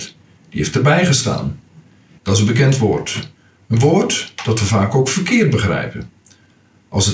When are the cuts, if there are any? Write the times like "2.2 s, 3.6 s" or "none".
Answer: 2.2 s